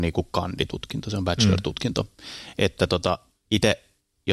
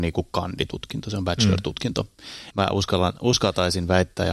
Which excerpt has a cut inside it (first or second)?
second